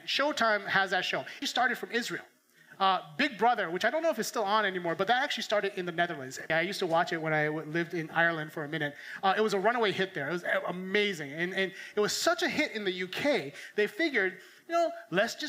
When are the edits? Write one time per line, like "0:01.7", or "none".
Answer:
0:01.4
0:06.5